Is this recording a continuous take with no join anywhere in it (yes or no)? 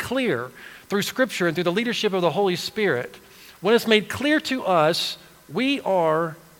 yes